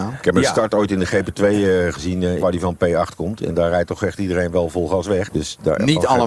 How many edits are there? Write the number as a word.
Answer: two